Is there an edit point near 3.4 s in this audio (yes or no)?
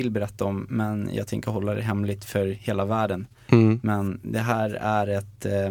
no